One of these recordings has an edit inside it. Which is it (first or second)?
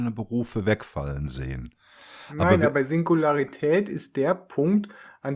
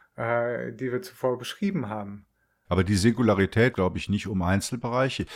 second